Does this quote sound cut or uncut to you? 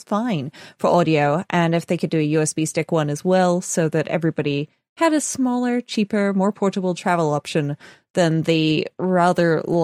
uncut